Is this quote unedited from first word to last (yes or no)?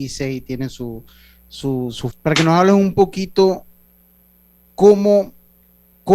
no